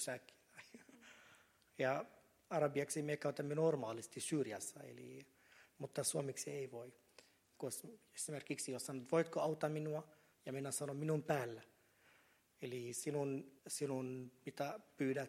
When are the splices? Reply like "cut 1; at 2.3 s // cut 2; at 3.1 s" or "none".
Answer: cut 1; at 7.6 s // cut 2; at 13.6 s